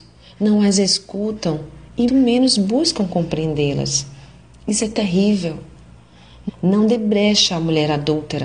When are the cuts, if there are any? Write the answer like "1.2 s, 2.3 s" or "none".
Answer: 2.1 s, 6.5 s